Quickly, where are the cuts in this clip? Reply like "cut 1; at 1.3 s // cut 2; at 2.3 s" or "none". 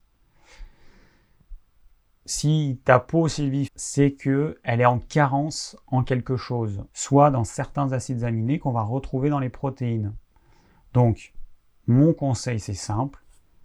cut 1; at 3.7 s // cut 2; at 6.9 s